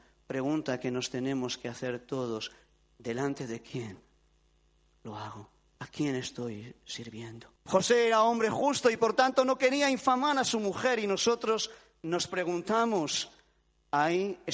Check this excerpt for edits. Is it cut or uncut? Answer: cut